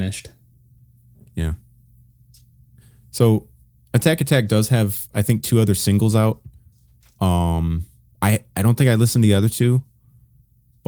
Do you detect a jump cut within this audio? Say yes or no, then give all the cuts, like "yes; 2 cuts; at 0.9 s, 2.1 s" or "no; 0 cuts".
no; 0 cuts